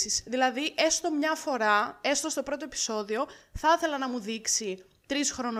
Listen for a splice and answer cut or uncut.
uncut